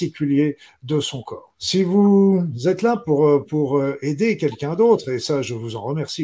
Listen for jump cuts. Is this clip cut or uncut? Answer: cut